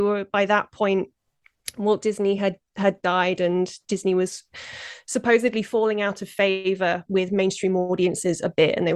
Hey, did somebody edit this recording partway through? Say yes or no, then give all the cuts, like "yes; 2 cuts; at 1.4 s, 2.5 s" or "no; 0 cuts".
no; 0 cuts